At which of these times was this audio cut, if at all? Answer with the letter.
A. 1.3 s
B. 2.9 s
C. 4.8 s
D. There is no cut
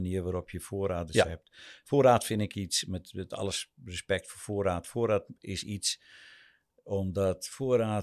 D